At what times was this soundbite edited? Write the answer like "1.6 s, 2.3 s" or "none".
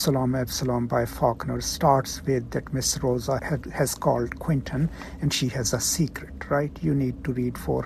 3.4 s